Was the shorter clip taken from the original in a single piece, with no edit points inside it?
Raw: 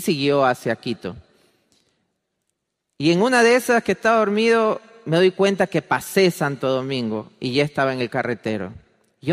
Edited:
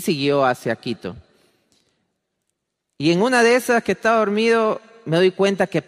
yes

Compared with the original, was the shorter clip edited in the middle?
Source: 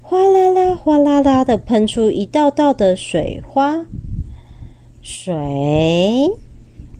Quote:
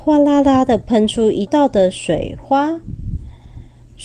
yes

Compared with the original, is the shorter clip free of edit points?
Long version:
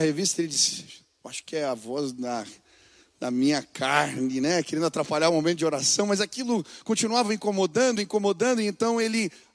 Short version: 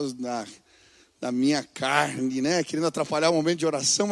yes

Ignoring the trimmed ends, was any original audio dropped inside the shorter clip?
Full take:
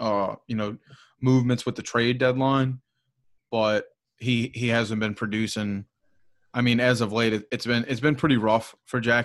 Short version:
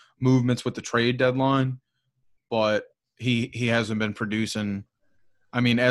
no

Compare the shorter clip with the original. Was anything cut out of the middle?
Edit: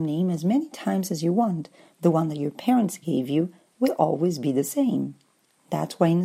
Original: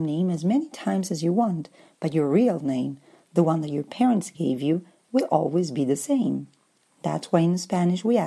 yes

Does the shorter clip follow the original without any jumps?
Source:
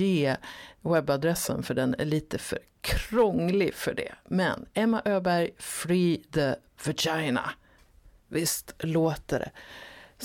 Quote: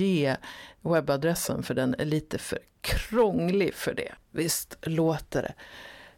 no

